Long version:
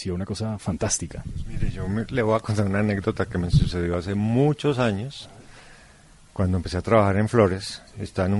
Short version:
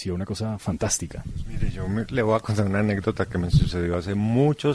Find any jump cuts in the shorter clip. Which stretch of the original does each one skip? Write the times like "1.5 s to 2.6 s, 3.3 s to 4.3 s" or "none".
none

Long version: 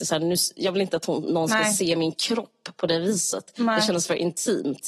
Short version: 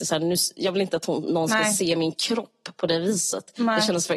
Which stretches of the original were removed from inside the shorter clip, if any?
none

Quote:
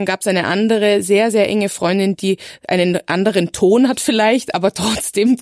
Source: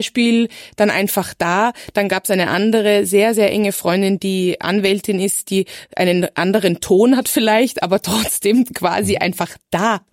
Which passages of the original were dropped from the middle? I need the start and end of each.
4.2 s to 5.4 s

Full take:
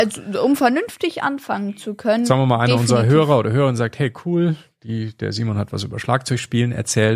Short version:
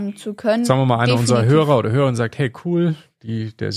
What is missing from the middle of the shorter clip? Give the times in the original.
none

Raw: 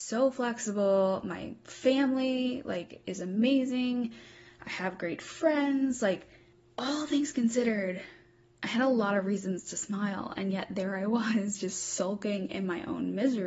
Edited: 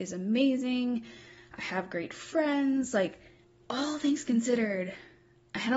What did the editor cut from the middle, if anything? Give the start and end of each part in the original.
none

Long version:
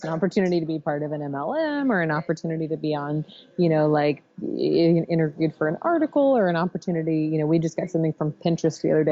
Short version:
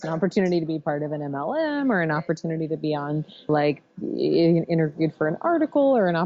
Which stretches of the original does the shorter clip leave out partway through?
3.5 s to 3.9 s

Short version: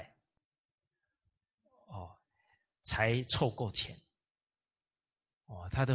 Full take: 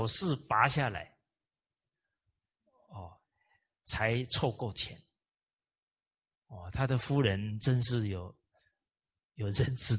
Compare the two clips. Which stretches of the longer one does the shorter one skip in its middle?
none

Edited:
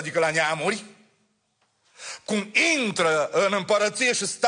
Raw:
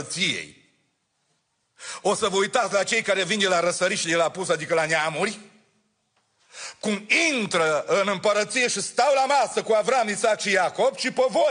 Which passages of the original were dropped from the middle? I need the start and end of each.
none

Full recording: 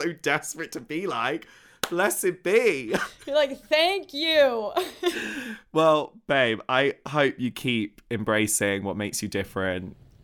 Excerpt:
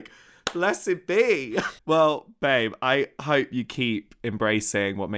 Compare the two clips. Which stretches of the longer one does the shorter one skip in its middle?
3.2 s to 5.7 s

